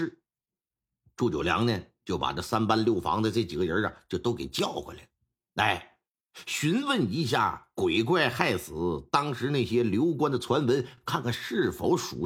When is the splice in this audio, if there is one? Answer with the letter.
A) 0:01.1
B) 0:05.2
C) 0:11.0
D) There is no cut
D